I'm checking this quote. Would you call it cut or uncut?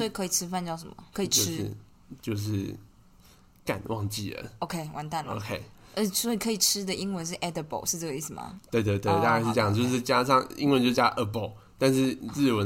cut